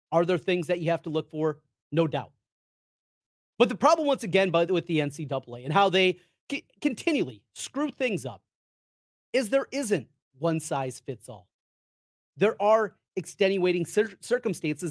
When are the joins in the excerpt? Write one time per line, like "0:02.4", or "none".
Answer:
none

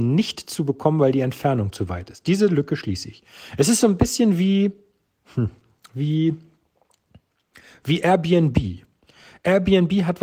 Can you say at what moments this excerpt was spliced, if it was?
none

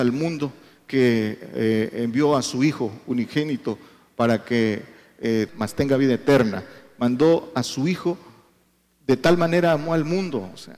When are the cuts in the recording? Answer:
0:05.5

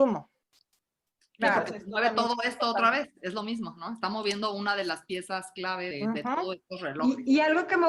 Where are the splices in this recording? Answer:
0:05.9

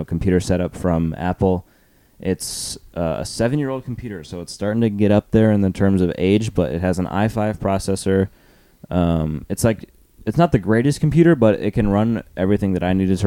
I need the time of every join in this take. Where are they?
none

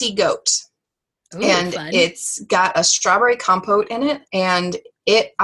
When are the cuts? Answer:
0:04.3

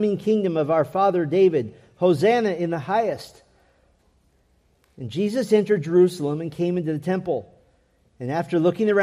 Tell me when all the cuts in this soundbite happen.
none

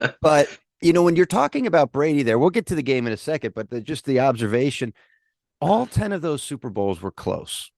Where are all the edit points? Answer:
none

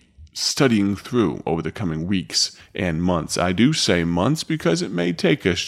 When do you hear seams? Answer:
none

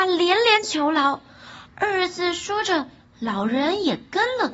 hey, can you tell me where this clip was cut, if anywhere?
0:01.7
0:03.0

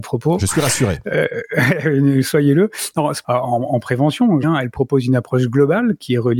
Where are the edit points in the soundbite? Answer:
0:03.2
0:04.4

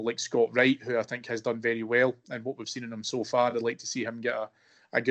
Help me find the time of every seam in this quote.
none

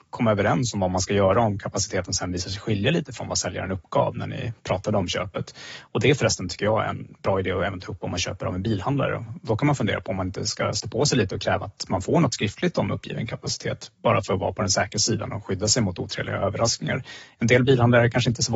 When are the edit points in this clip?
none

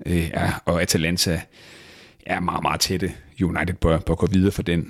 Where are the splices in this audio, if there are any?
none

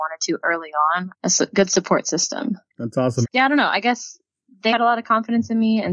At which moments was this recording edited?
0:01.1
0:03.2
0:04.7

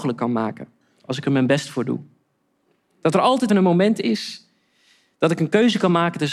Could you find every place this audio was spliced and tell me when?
0:03.5

